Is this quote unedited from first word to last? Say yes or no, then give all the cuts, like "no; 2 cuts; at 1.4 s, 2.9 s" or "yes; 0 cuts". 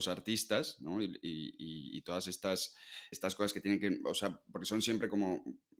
no; 1 cut; at 3.1 s